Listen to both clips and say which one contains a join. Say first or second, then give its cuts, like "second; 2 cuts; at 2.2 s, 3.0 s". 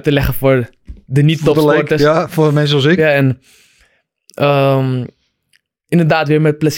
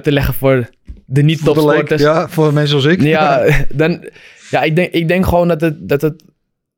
first; 1 cut; at 3.0 s